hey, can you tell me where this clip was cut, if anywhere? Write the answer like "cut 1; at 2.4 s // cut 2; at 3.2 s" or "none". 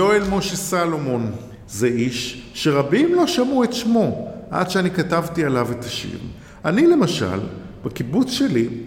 none